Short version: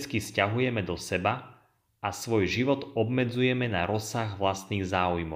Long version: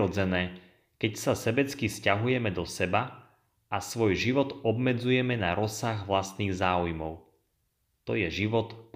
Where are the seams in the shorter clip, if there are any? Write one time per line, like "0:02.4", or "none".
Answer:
none